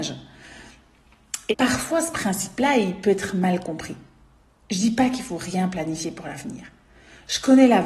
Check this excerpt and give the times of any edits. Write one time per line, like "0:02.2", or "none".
0:01.5